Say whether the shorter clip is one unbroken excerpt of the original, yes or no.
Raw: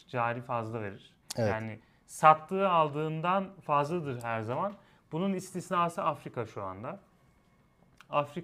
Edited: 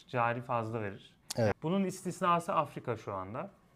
no